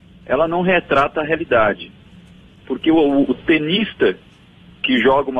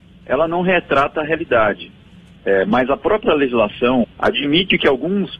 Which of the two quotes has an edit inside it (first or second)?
second